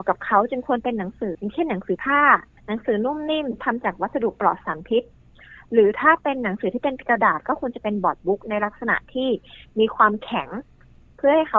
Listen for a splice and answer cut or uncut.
cut